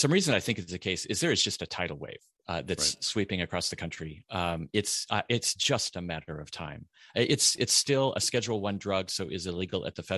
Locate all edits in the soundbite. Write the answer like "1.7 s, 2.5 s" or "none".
none